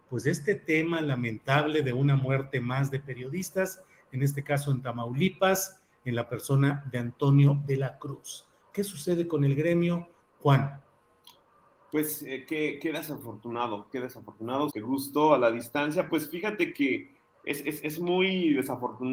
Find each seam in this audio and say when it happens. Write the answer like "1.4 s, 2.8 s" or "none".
10.3 s, 14.7 s